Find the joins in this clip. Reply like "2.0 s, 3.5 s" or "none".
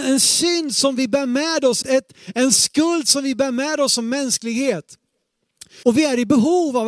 1.8 s, 5.8 s

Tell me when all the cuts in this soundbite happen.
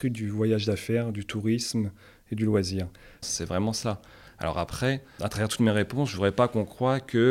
3.2 s, 5.2 s

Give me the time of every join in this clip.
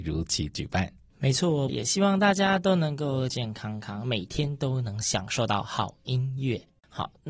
1.7 s, 3.3 s

